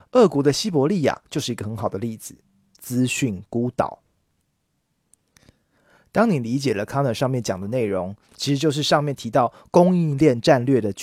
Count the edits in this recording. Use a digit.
2